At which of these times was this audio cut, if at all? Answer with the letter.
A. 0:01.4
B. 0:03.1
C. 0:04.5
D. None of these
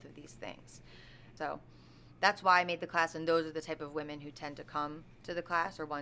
A